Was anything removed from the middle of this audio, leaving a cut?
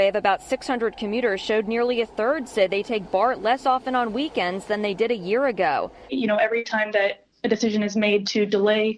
yes; 1 cut; at 6.1 s

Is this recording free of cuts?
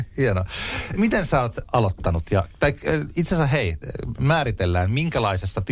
yes; 0 cuts

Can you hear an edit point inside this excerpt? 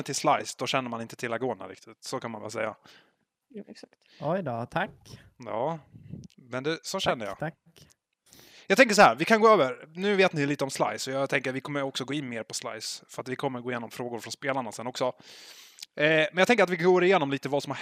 no; 0 cuts

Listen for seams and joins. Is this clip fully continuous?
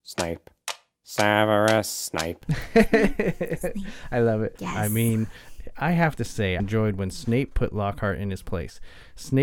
no; 2 cuts; at 4.6 s, 6.6 s

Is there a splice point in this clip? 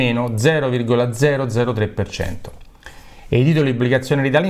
no; 0 cuts

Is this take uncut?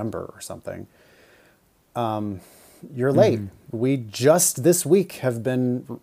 no; 1 cut; at 3.7 s

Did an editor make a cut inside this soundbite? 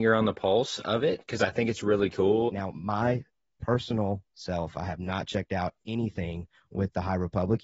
yes; 1 cut; at 2.5 s

